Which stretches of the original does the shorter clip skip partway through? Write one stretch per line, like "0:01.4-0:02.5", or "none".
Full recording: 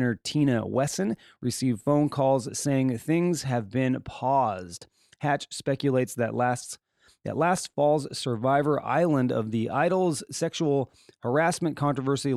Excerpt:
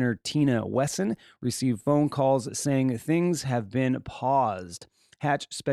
none